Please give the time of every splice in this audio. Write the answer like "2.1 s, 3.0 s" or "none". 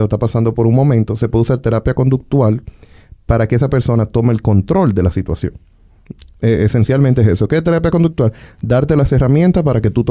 none

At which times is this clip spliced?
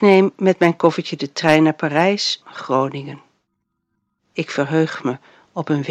2.4 s

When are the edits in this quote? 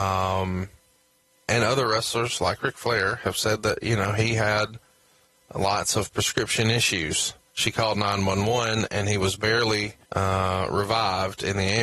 7.5 s, 10.0 s

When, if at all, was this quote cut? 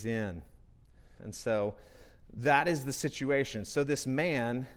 1.2 s

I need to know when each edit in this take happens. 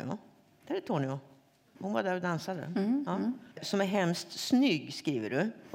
3.5 s

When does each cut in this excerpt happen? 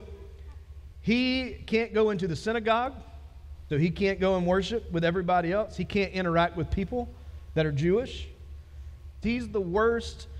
3.7 s, 9.2 s

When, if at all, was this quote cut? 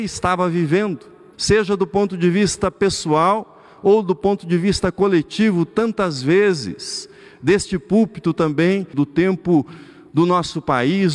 1.3 s, 8.9 s

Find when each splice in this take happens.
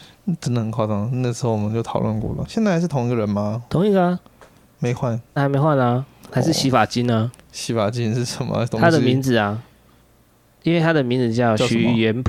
5.4 s

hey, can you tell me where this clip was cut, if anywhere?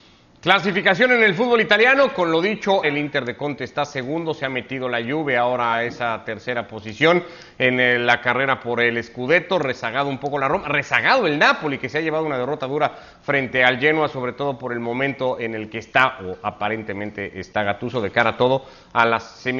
2.8 s

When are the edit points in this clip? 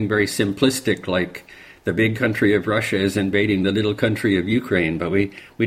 none

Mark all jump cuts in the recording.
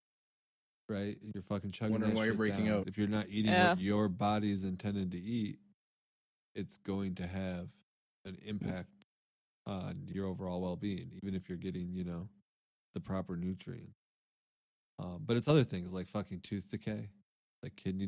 2.8 s, 14.8 s

